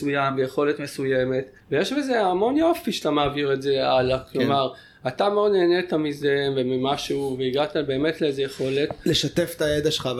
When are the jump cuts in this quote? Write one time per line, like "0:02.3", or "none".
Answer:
0:01.6